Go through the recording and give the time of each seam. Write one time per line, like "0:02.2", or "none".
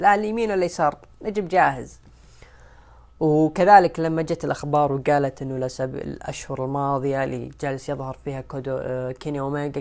none